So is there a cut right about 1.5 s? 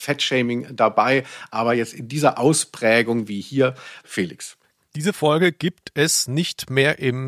no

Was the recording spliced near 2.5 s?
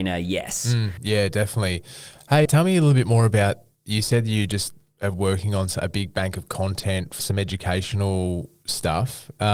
yes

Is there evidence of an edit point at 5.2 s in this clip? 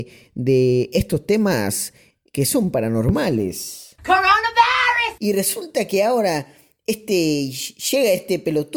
yes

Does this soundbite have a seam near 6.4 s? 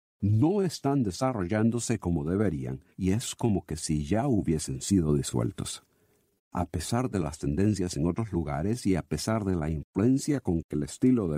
yes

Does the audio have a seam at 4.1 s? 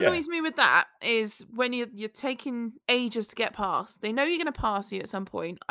no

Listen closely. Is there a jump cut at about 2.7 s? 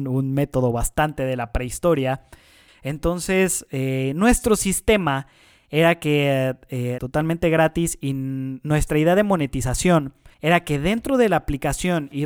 yes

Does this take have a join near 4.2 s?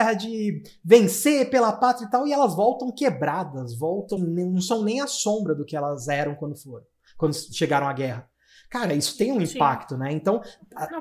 yes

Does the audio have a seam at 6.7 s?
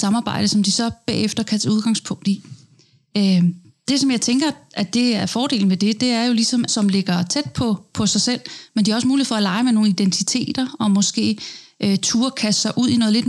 yes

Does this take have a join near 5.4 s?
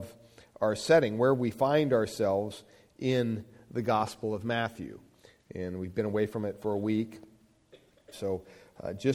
no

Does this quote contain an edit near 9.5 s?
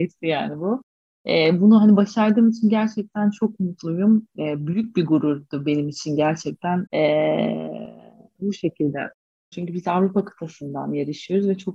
yes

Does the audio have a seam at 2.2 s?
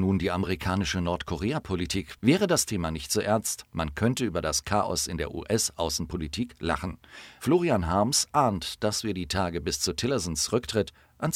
yes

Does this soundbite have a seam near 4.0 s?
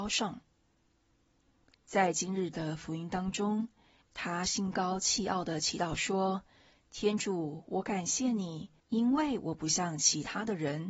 yes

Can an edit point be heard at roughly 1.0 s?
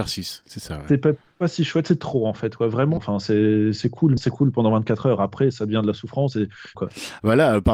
no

